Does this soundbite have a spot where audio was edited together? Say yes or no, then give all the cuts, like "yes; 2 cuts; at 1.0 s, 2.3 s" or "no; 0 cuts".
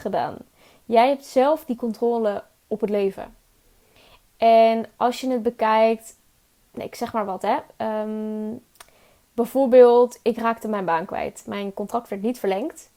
no; 0 cuts